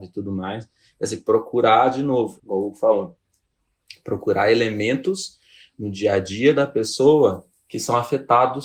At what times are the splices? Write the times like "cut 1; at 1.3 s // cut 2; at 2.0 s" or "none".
cut 1; at 2.4 s

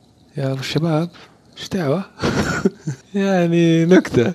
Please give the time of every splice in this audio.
cut 1; at 3.0 s

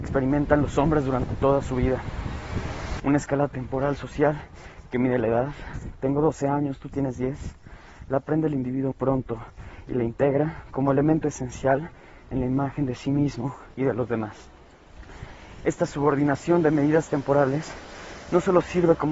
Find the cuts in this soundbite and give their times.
cut 1; at 3.0 s // cut 2; at 8.9 s

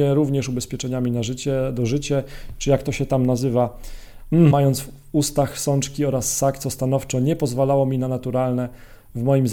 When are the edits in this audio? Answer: cut 1; at 4.5 s

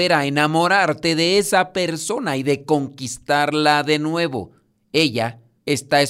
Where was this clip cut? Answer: none

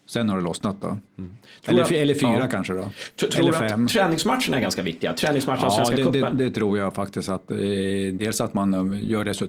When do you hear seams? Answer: none

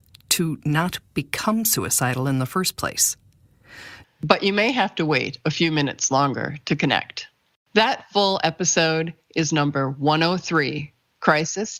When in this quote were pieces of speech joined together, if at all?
cut 1; at 4.0 s

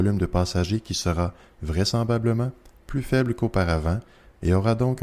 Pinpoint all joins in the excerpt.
none

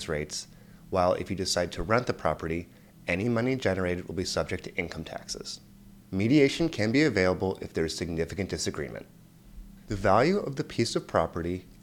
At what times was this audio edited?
cut 1; at 6.0 s // cut 2; at 9.9 s

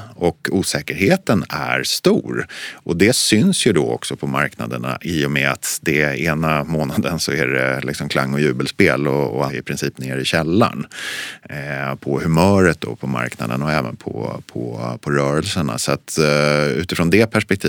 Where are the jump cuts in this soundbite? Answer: cut 1; at 9.5 s

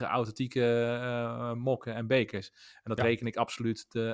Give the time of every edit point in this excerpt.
none

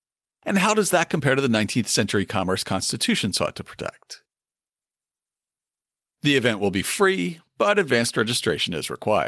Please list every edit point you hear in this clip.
none

